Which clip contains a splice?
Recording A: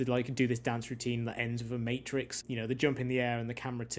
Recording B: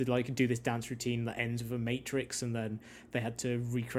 A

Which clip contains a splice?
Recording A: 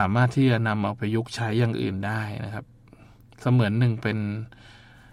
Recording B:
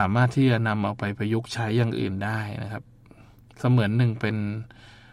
A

